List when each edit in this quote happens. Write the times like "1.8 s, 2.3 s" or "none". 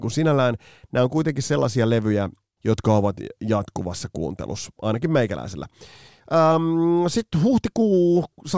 2.6 s